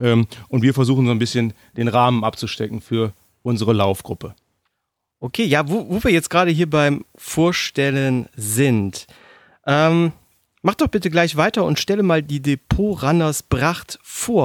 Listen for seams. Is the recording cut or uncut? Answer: uncut